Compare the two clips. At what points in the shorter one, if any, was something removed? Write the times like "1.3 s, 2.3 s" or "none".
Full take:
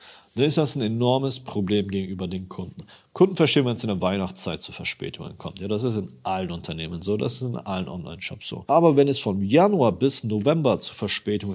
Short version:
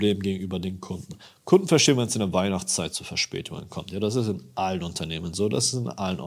none